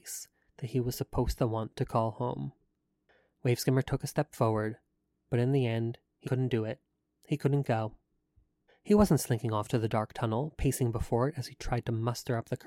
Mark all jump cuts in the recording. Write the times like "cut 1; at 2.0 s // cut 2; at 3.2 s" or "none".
cut 1; at 6.2 s // cut 2; at 8.7 s